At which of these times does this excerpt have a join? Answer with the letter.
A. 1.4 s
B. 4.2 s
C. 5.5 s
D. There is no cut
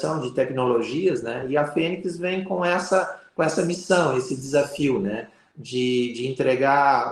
D